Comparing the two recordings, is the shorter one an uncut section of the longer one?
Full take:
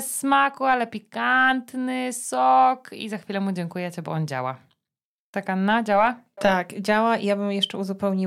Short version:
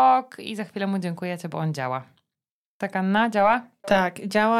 yes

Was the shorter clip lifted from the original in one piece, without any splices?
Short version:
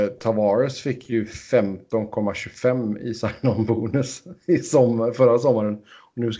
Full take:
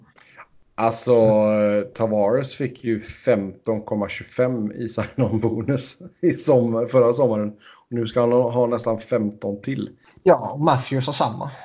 yes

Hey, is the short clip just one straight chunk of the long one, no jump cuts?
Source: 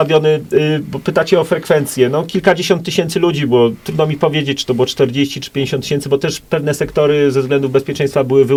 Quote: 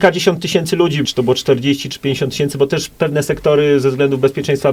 no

